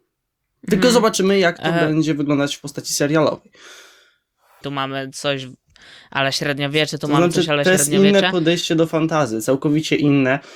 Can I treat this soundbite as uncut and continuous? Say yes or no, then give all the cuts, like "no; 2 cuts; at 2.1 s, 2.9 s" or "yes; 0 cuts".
no; 1 cut; at 4.6 s